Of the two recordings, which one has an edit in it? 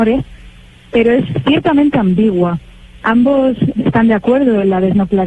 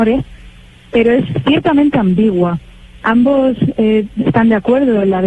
first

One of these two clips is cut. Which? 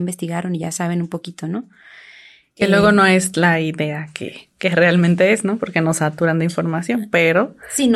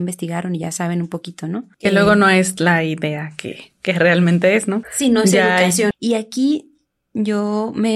second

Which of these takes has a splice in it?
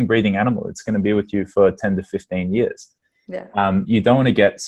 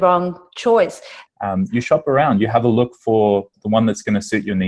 second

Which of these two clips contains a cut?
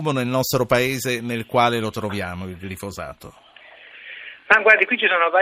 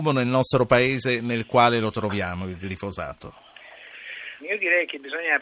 second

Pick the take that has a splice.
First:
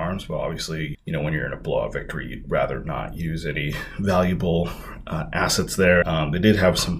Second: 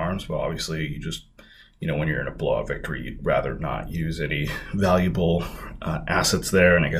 first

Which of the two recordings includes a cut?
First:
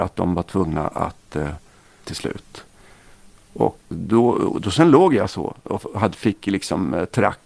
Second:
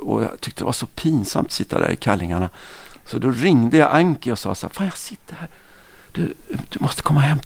first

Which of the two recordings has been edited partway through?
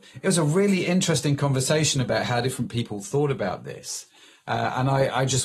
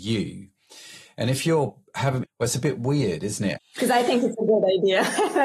second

